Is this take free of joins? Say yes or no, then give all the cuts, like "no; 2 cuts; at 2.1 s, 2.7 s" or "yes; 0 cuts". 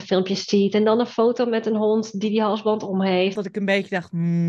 no; 1 cut; at 3.4 s